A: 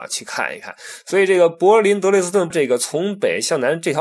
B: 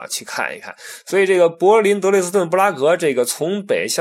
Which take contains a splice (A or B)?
A